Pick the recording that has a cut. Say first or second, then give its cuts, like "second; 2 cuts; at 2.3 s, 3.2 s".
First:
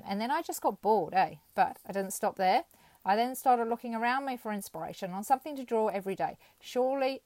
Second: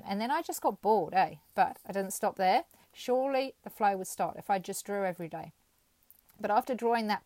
second; 1 cut; at 2.8 s